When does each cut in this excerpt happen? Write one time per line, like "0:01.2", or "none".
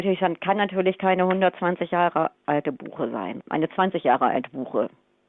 0:03.4